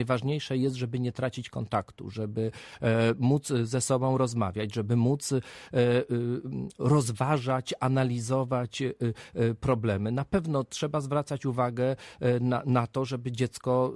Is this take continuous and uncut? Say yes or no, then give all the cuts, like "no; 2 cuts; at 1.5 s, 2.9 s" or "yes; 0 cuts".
yes; 0 cuts